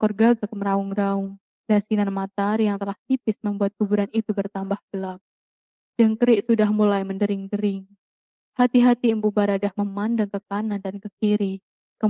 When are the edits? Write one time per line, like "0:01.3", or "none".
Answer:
none